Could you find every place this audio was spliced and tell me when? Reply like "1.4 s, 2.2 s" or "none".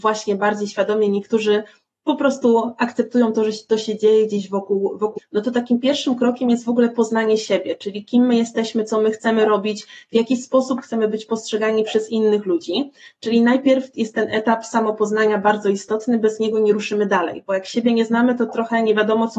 5.2 s